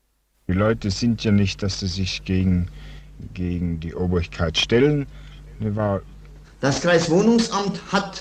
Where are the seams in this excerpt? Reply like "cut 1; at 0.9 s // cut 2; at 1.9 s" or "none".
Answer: cut 1; at 6.4 s